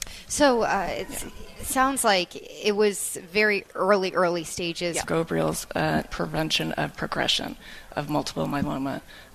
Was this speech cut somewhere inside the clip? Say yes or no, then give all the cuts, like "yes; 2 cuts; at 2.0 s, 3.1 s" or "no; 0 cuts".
yes; 3 cuts; at 3.6 s, 5.0 s, 6.1 s